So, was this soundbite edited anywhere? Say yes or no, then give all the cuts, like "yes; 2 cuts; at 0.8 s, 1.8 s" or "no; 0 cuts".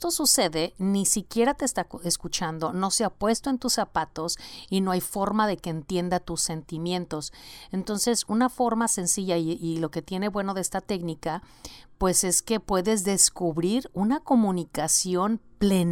no; 0 cuts